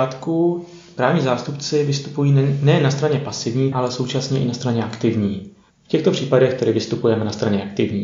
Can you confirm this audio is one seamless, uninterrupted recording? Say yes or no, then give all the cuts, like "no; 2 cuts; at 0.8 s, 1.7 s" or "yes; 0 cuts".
no; 2 cuts; at 3.7 s, 5.7 s